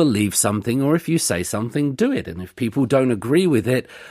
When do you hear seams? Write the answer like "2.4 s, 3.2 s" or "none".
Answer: none